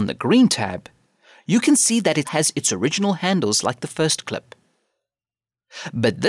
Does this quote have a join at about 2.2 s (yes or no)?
yes